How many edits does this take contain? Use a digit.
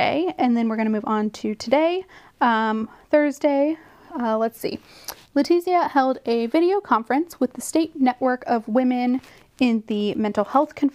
0